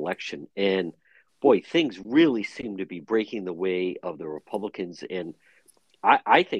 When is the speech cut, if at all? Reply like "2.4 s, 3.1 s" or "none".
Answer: none